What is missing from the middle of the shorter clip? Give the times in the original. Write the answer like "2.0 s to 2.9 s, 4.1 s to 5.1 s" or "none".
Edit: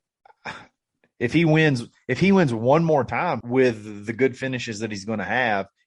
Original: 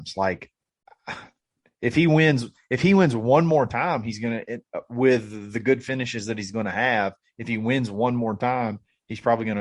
4.0 s to 4.9 s